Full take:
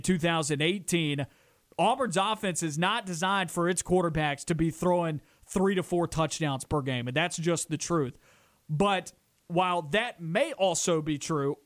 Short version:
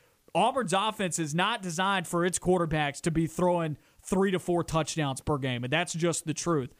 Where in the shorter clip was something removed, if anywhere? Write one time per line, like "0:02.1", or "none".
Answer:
none